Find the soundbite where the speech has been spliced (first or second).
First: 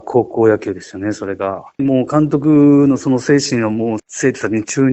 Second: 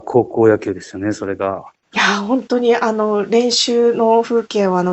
first